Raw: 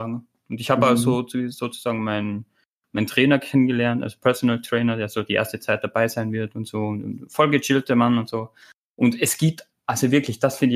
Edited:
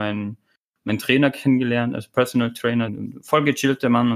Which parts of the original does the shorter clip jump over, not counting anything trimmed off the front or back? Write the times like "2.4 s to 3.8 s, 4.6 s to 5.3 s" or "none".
5.0 s to 6.9 s